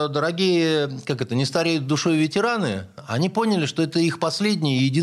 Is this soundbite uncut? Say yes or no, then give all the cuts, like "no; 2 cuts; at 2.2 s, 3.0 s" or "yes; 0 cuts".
yes; 0 cuts